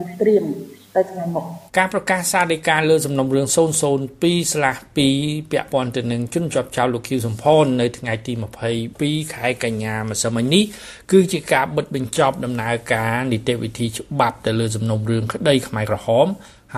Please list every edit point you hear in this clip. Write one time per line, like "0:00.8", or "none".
0:01.7